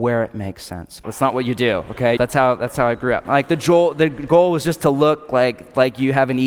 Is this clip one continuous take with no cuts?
no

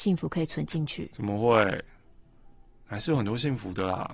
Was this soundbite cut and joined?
no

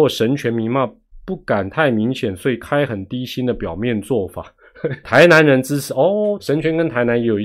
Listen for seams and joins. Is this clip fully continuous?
no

